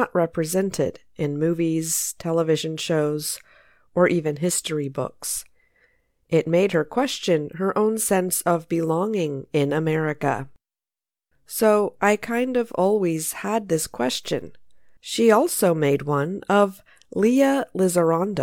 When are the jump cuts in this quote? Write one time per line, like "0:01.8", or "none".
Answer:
0:11.3
0:15.0